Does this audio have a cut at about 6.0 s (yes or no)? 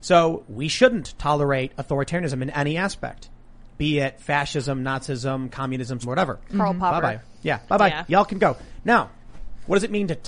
yes